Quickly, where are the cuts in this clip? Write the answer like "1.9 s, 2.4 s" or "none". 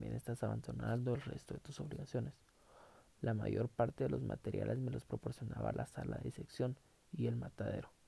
3.1 s